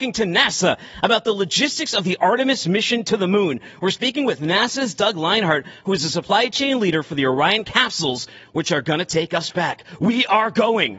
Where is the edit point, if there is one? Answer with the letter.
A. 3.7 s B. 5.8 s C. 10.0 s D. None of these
D